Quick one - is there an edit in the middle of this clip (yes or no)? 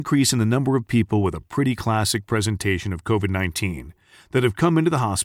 no